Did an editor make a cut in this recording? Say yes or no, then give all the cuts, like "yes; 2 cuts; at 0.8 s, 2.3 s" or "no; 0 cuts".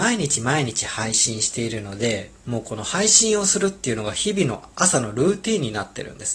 yes; 1 cut; at 2.4 s